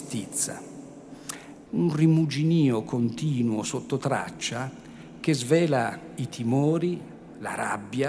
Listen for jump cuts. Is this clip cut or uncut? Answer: cut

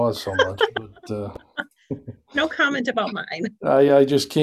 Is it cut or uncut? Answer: uncut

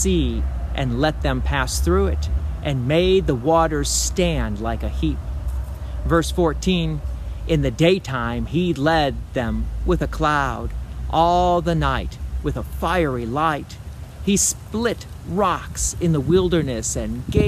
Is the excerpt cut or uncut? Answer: uncut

